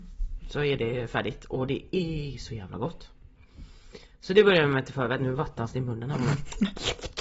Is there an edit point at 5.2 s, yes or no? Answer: no